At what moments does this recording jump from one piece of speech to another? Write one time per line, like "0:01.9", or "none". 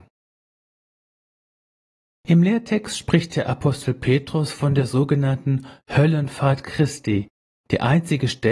none